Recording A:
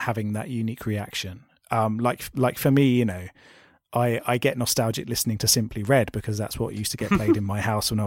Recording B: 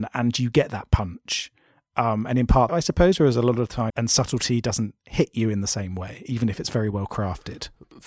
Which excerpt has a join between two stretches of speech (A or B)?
B